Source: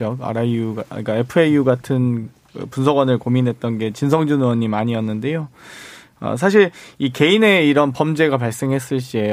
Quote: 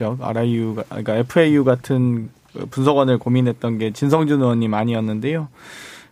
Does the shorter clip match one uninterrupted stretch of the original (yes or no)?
yes